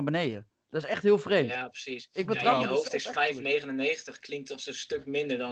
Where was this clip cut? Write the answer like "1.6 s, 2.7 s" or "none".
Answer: none